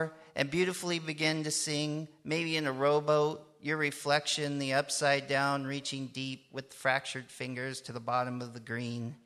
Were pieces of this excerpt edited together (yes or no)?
no